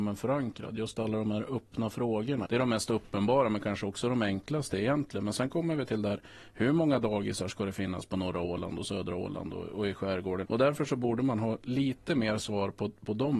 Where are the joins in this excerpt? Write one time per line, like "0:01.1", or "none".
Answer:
0:02.4
0:10.4